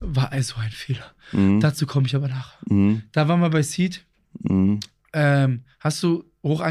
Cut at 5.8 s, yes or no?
no